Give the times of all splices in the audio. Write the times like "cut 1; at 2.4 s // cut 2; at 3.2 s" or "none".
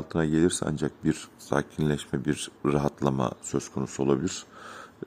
cut 1; at 2.6 s